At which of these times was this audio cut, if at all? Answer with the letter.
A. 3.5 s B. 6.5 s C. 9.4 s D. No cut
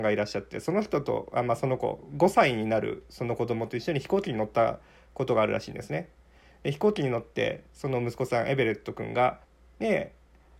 C